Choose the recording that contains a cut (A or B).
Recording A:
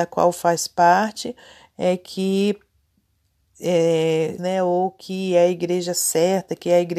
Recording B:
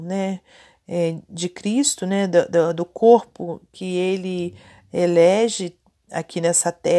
A